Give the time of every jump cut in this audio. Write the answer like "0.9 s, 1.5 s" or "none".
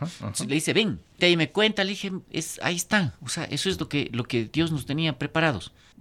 1.2 s, 2.3 s